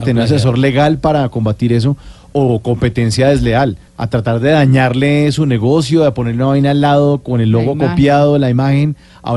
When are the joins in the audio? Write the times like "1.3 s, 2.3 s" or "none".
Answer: 3.9 s